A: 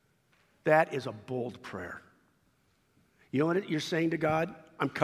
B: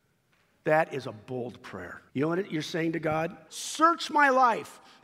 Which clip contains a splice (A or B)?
B